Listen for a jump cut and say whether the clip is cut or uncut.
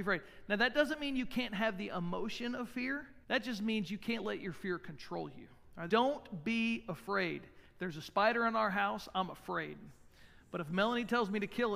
cut